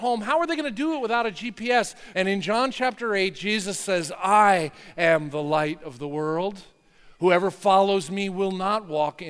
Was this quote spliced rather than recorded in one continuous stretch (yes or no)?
yes